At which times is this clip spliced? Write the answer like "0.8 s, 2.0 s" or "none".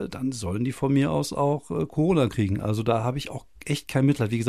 none